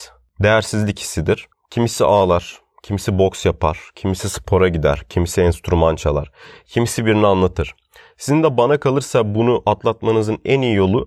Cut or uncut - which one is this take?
cut